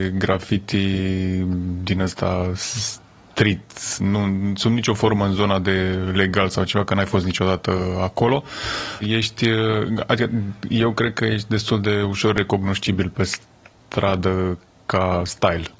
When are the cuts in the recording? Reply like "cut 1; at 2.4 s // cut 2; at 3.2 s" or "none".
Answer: cut 1; at 4.0 s // cut 2; at 9.0 s